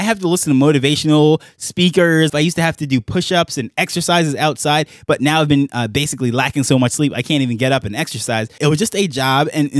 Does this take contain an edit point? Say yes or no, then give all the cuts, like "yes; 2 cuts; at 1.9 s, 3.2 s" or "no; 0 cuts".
yes; 2 cuts; at 2.3 s, 8.6 s